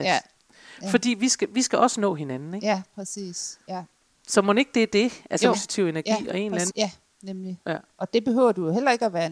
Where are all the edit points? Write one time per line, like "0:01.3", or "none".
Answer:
0:05.5
0:06.7